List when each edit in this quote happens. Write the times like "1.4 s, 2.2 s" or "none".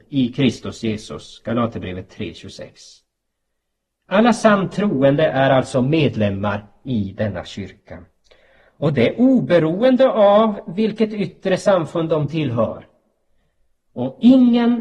none

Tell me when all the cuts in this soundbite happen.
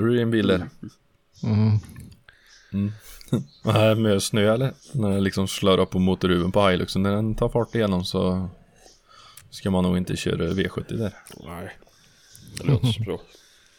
4.8 s

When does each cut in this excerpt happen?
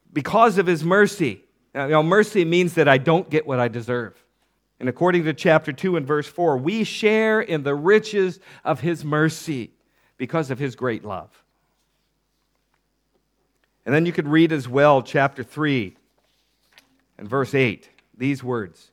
4.6 s

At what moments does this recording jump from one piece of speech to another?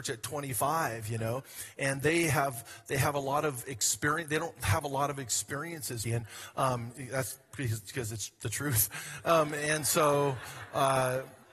6.0 s

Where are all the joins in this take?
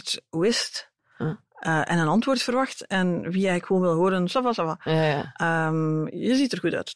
none

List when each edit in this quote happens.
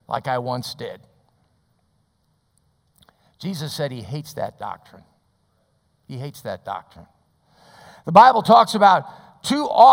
none

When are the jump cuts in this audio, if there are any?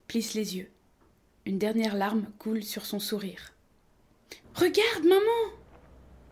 4.4 s

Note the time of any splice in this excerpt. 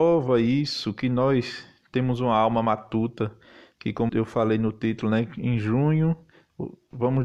4.1 s

